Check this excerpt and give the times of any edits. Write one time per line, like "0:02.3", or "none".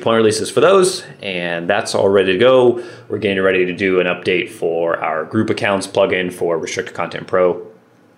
none